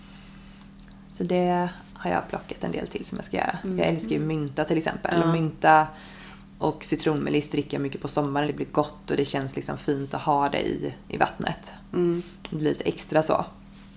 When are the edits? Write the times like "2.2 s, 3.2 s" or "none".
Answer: 8.5 s, 11.0 s